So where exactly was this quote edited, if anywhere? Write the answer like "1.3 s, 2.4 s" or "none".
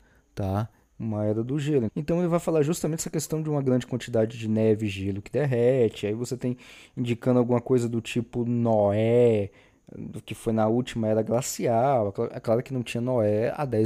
1.9 s